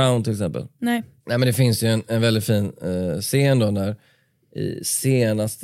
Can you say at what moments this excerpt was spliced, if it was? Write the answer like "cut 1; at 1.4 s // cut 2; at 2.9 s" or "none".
none